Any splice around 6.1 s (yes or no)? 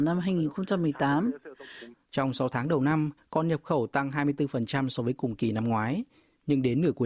no